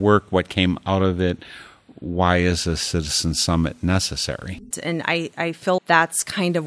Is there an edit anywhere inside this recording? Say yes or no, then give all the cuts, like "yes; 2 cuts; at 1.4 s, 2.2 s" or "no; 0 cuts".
yes; 2 cuts; at 4.7 s, 5.8 s